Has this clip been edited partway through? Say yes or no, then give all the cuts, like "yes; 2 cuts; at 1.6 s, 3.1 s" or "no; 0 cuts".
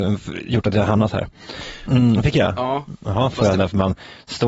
yes; 2 cuts; at 1.8 s, 3.5 s